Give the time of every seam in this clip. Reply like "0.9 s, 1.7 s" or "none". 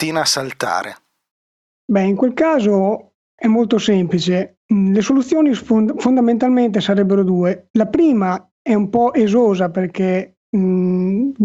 none

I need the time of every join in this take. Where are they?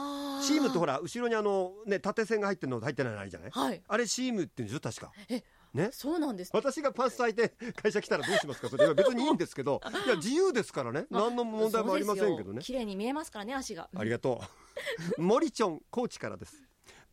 6.5 s

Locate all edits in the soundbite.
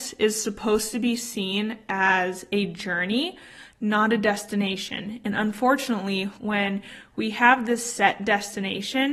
6.4 s

